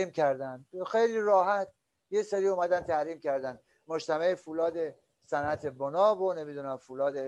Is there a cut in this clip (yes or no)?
no